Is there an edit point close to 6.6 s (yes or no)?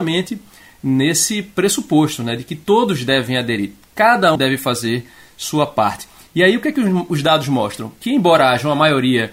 no